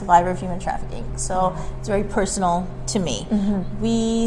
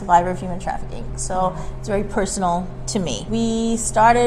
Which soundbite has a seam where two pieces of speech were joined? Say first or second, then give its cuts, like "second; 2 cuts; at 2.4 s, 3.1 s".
second; 1 cut; at 3.3 s